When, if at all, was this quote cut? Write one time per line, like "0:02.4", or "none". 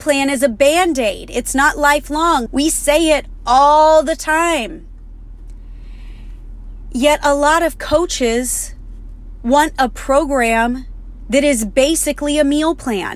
0:02.5